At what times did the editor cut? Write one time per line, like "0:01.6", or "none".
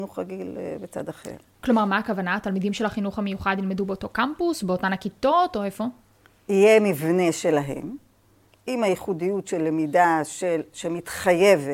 none